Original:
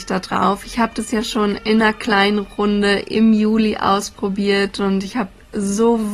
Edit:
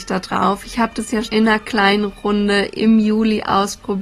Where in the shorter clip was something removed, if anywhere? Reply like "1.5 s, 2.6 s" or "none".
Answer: 1.2 s